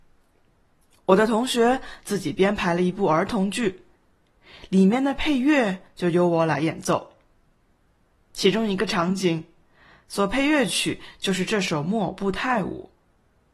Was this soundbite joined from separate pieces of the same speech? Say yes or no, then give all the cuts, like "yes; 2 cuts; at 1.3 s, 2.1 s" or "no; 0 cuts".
no; 0 cuts